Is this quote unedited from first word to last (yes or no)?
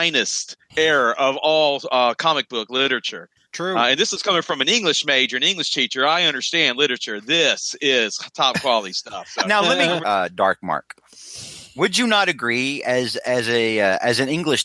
no